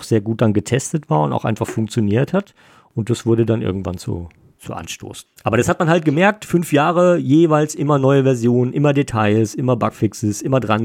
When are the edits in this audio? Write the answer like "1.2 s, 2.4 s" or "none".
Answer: 5.3 s